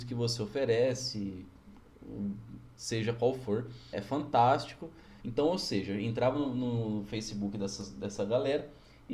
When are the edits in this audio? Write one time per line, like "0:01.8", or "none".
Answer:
0:03.9
0:05.2